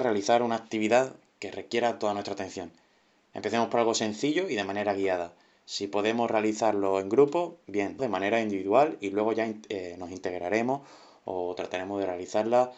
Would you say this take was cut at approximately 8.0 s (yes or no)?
yes